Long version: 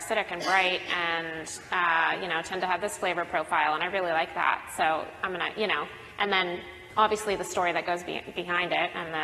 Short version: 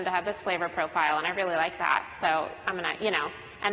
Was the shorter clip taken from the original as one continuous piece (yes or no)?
yes